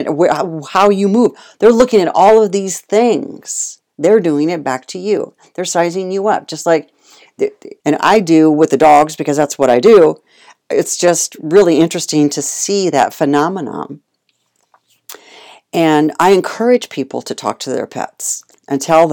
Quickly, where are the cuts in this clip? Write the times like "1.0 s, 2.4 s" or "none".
7.8 s